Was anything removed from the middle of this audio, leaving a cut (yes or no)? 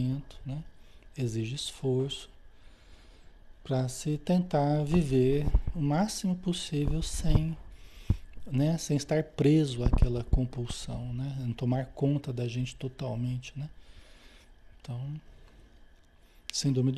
no